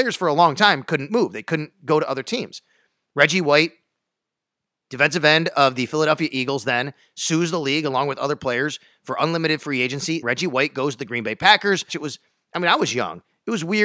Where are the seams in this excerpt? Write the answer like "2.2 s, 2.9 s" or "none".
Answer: 10.2 s, 11.9 s